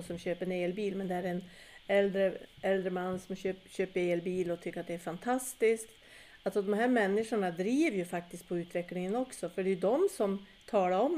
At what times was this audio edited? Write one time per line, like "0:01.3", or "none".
none